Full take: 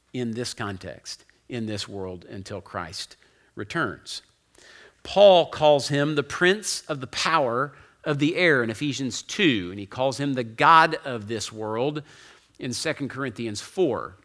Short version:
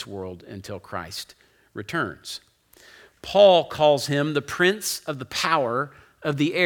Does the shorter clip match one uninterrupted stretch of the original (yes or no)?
yes